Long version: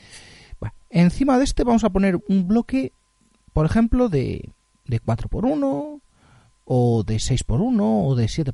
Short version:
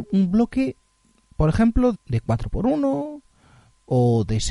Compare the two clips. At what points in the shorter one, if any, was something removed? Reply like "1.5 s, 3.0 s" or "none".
1.9 s